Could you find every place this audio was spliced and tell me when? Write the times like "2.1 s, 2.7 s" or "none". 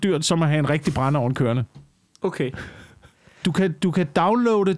3.4 s